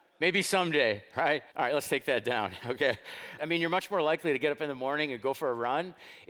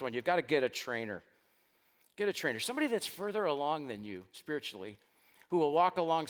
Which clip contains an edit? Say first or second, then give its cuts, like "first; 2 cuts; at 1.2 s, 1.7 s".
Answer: first; 2 cuts; at 1.5 s, 3.4 s